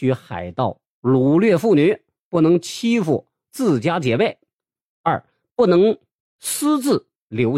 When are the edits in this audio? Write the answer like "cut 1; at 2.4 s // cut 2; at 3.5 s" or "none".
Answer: none